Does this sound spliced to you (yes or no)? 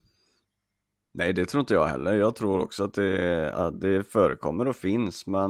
no